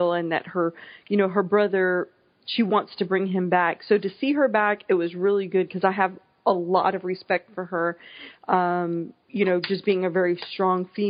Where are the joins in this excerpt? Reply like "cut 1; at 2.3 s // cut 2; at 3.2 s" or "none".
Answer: none